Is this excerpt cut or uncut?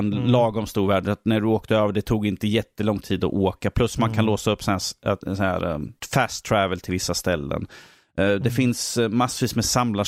uncut